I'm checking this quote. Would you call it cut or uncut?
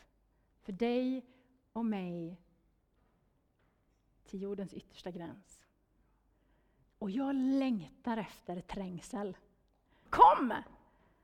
cut